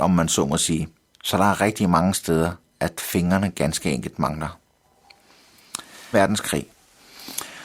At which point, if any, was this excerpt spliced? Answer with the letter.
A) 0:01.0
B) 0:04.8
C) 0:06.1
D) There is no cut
C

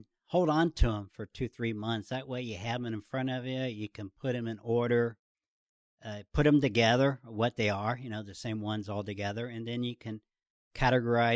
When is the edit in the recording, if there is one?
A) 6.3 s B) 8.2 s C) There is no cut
C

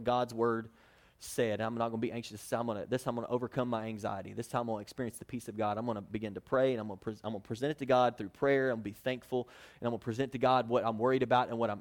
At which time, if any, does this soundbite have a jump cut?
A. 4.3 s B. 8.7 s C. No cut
C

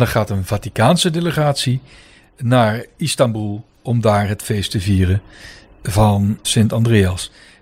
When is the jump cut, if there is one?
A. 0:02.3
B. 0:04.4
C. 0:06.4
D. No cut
C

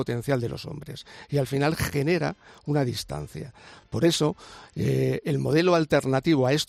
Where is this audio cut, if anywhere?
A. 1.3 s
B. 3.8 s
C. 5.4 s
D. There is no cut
D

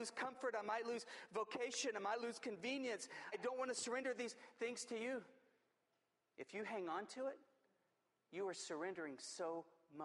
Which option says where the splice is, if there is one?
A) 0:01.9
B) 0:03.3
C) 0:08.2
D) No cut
B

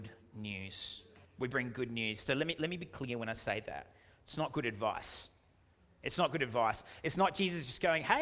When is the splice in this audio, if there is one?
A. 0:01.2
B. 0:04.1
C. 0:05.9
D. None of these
A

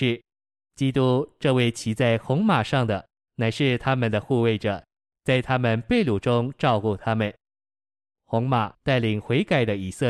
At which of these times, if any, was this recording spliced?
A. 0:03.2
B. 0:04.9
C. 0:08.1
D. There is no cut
C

